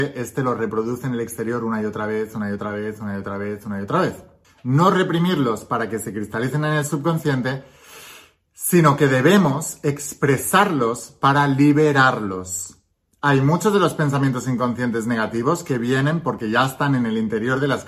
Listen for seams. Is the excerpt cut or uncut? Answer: cut